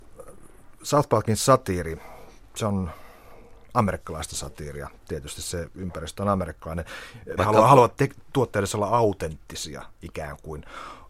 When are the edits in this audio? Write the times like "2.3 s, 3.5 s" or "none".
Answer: 7.4 s